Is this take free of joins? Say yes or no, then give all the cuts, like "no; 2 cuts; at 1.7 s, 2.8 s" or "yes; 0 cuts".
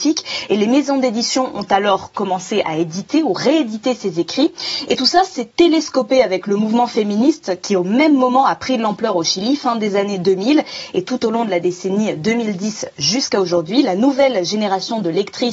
yes; 0 cuts